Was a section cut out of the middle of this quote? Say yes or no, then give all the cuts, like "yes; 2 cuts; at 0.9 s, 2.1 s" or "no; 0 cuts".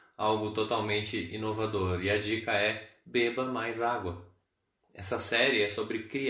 no; 0 cuts